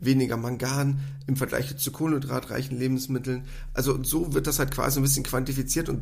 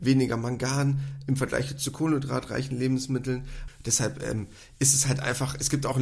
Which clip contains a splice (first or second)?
second